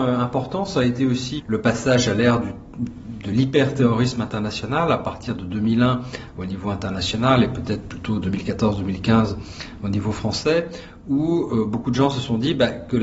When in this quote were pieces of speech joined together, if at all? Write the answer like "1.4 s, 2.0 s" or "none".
1.4 s